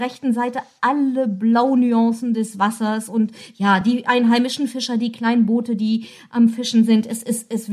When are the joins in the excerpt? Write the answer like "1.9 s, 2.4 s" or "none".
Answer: none